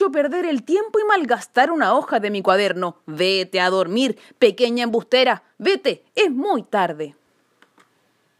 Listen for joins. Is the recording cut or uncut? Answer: uncut